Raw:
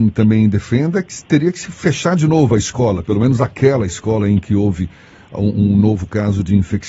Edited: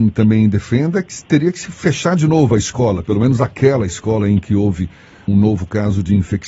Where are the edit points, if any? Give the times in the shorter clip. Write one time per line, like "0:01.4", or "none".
0:05.3